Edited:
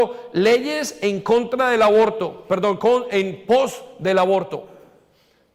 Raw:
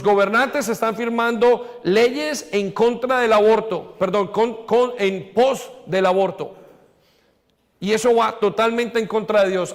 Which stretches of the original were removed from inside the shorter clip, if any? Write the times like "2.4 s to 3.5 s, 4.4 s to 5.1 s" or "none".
4.3 s to 4.7 s